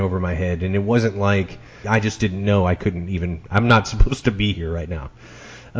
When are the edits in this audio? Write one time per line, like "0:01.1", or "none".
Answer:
0:01.8